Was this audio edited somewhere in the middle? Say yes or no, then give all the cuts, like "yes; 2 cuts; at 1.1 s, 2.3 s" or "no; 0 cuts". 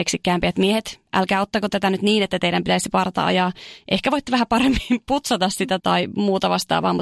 yes; 1 cut; at 5.8 s